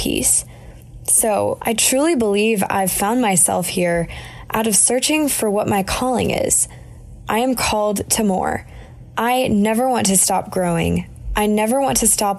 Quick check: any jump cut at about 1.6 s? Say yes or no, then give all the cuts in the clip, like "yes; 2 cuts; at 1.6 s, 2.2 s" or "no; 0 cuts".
yes; 1 cut; at 1.6 s